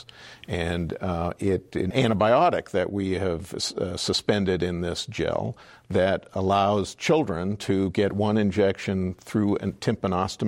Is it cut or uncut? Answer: cut